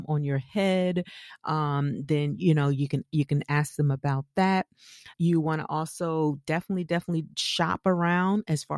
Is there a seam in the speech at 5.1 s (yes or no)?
yes